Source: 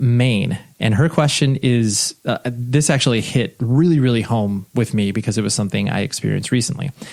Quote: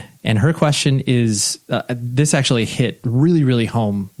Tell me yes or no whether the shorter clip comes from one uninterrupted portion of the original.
yes